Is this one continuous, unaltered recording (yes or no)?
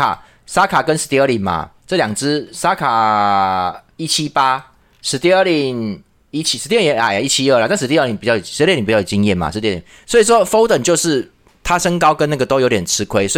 yes